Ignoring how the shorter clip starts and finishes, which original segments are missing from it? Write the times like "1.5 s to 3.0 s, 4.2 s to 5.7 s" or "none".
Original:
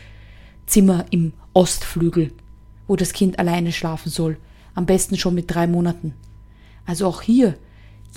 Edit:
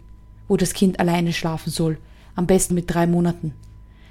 5.1 s to 5.3 s